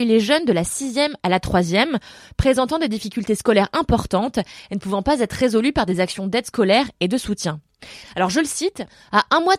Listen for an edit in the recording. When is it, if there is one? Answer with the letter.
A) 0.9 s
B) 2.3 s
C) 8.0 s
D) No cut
C